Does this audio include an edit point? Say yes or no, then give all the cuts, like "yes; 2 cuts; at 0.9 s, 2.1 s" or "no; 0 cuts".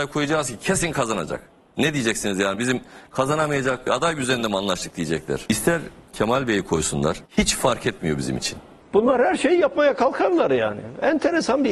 no; 0 cuts